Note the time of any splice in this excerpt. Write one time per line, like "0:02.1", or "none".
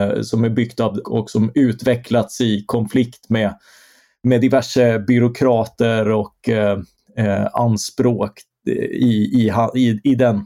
0:01.0